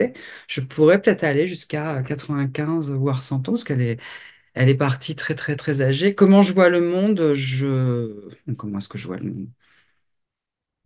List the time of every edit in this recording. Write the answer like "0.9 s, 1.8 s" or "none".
none